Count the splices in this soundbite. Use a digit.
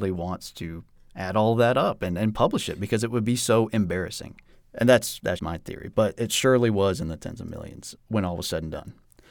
2